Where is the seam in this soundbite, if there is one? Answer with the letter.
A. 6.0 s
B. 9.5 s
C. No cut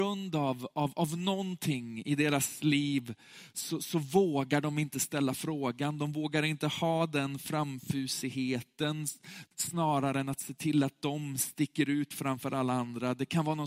B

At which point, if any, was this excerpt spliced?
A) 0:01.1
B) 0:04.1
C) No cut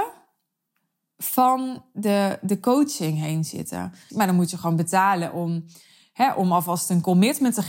B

